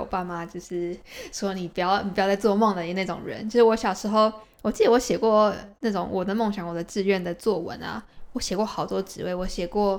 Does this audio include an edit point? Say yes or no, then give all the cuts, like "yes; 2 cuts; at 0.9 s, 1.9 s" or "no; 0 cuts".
no; 0 cuts